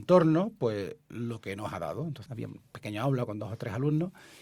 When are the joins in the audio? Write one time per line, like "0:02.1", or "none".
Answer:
0:02.3